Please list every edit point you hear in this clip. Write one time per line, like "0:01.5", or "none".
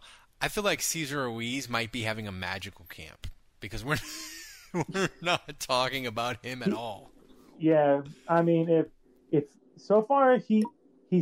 none